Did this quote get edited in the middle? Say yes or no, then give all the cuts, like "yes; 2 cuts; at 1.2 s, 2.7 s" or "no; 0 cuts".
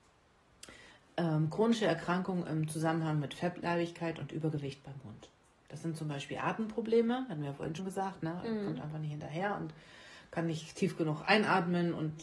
yes; 1 cut; at 7.8 s